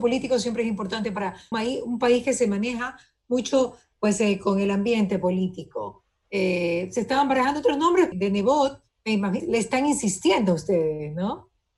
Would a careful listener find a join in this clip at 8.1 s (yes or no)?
yes